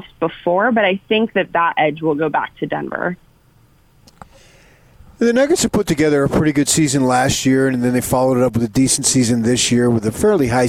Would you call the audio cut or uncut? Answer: uncut